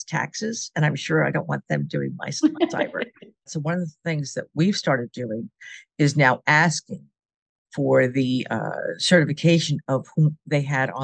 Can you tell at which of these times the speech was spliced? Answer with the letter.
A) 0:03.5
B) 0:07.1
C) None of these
A